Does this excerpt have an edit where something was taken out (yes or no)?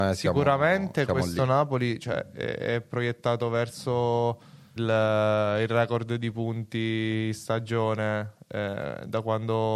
yes